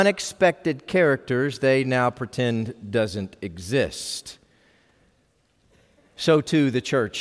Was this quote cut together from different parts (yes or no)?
no